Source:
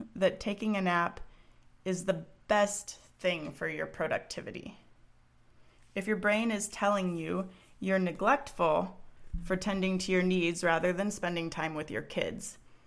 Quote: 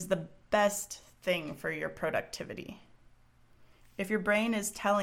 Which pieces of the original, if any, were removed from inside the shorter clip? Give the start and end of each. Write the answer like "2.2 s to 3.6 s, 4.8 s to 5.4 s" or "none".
none